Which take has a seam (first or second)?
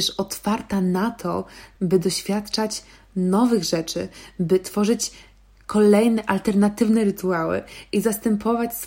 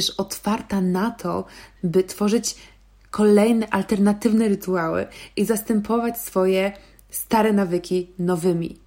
second